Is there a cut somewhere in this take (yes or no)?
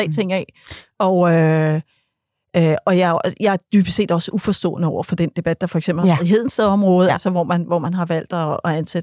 no